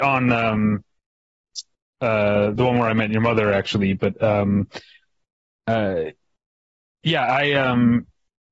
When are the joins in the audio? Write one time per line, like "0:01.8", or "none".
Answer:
none